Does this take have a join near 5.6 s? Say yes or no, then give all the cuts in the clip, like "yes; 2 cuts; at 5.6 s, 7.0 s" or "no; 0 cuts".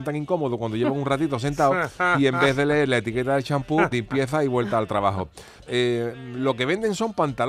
yes; 2 cuts; at 3.9 s, 5.6 s